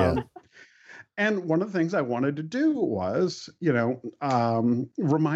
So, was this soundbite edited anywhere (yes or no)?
no